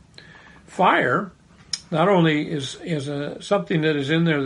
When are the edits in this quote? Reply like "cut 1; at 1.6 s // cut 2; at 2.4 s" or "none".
none